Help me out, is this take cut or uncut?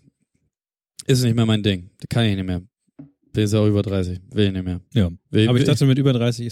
uncut